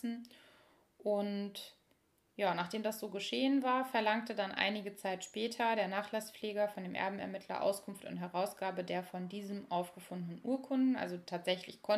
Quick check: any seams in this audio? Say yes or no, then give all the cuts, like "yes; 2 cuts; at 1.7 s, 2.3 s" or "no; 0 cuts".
no; 0 cuts